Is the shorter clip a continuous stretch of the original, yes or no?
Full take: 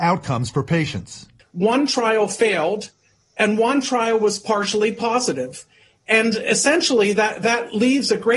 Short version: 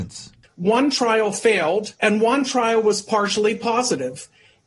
no